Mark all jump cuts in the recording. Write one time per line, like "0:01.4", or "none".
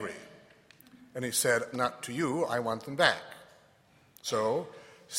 0:01.7